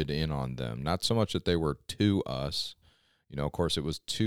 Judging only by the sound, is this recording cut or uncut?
uncut